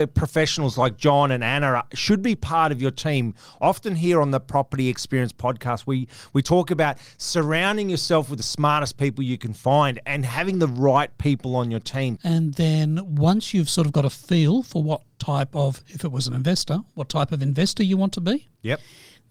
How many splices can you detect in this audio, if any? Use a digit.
1